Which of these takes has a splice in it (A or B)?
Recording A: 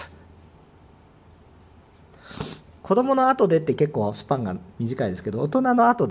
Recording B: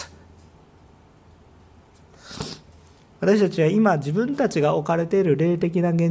A